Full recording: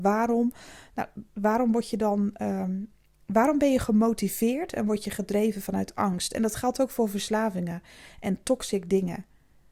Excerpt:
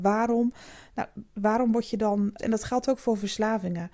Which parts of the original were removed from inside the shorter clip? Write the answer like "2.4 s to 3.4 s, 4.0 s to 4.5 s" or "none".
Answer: 2.4 s to 6.3 s